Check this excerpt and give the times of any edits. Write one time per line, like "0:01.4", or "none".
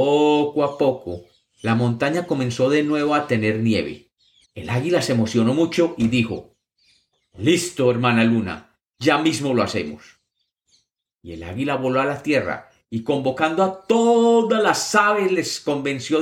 0:04.4